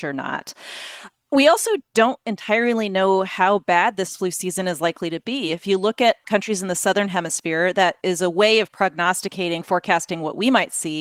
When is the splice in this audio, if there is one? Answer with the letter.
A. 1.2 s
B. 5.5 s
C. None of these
C